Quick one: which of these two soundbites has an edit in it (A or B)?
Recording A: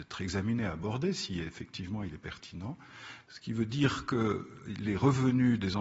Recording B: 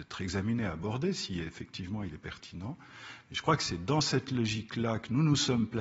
A